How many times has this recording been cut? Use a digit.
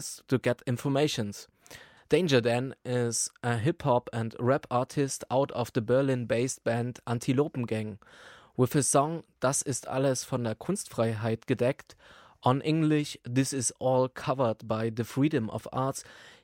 1